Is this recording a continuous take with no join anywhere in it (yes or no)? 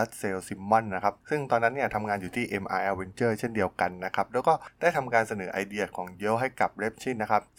no